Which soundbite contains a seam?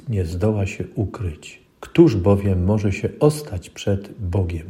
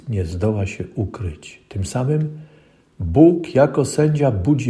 first; 1 cut; at 1.7 s

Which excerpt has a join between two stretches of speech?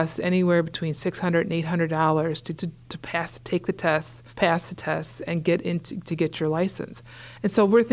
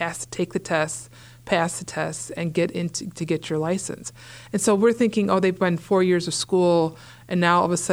first; 2 cuts; at 2.6 s, 4.3 s

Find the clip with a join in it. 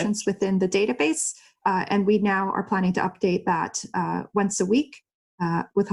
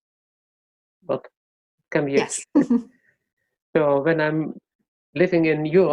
second; 1 cut; at 2.4 s

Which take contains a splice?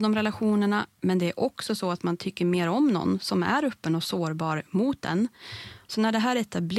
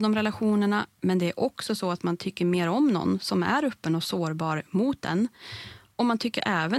first; 1 cut; at 5.9 s

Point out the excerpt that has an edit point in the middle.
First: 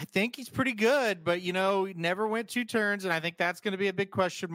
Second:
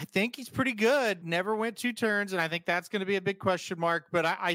second; 1 cut; at 1.2 s

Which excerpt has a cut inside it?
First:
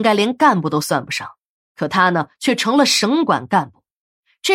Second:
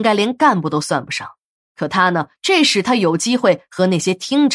second; 1 cut; at 2.4 s

